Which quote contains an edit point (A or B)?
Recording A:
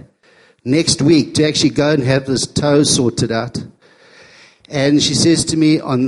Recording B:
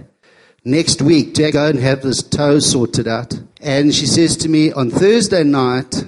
B